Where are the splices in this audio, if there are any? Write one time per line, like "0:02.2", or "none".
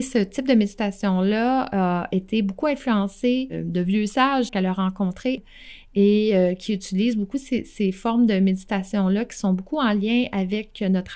0:04.5